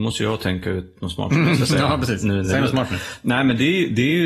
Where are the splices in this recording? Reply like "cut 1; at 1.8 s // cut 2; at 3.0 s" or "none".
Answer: none